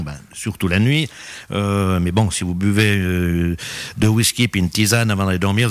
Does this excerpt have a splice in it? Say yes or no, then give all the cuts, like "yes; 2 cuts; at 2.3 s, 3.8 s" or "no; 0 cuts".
no; 0 cuts